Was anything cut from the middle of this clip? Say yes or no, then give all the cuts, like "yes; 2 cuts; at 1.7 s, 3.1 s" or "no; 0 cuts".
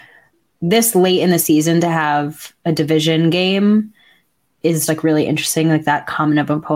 yes; 1 cut; at 4.9 s